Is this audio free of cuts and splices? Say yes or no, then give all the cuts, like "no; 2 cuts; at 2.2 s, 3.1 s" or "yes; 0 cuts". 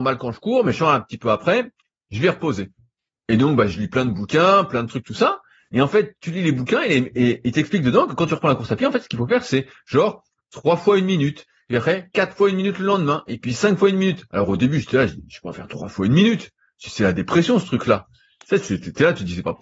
yes; 0 cuts